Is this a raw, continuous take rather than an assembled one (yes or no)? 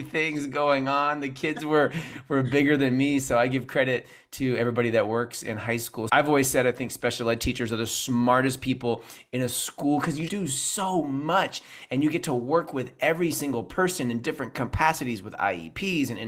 no